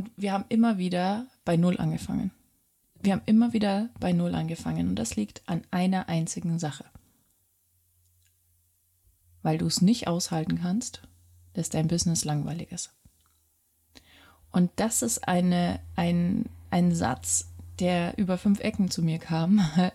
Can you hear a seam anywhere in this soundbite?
no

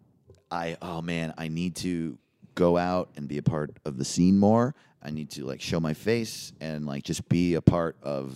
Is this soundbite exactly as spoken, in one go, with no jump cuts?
yes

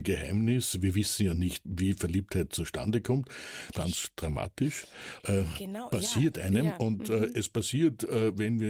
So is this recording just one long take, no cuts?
no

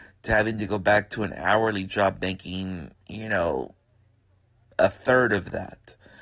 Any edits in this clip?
yes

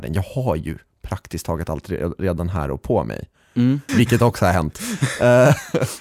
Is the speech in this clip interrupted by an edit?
yes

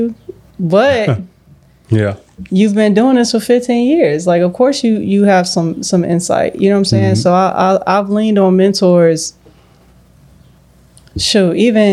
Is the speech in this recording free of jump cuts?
yes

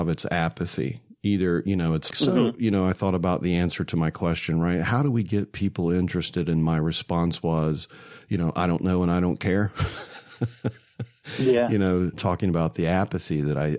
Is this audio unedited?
no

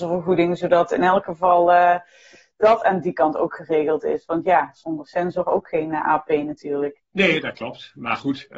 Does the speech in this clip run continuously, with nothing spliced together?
no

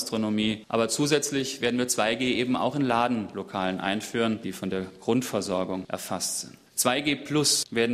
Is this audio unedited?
no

